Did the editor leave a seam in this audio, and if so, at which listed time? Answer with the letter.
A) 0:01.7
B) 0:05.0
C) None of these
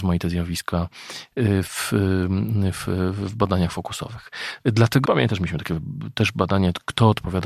B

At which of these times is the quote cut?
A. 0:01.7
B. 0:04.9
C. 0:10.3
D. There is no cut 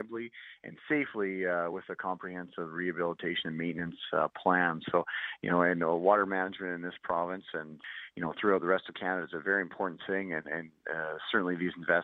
D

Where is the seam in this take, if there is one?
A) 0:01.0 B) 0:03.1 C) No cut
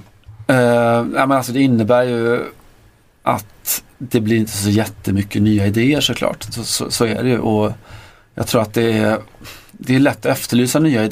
C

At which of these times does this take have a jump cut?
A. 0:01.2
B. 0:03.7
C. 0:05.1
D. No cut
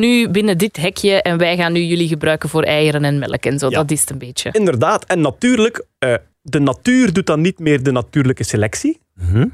D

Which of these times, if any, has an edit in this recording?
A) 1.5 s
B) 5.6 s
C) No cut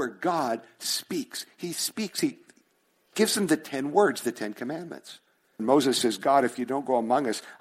B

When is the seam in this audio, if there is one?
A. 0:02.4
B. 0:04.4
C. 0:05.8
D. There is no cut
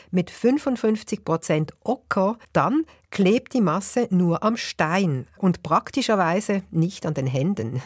A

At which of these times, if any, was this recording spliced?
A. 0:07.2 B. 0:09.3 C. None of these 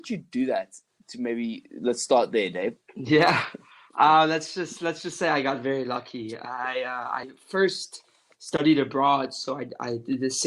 C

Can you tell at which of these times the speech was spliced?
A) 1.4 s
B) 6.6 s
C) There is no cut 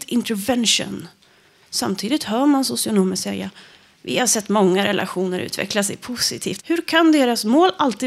B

